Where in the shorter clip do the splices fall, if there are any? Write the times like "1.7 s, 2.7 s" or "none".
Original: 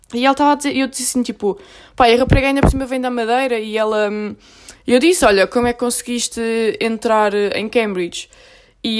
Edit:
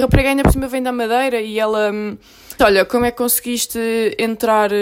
2.6 s